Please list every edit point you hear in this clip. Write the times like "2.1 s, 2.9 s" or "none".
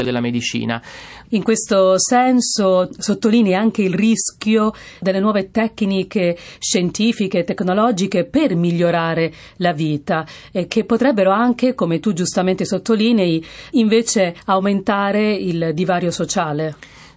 1.2 s, 13.7 s